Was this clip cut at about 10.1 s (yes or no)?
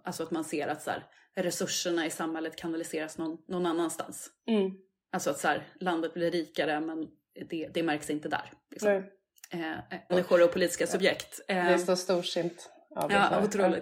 yes